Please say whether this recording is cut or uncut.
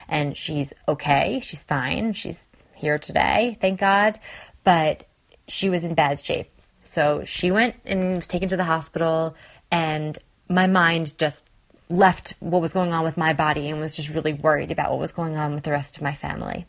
uncut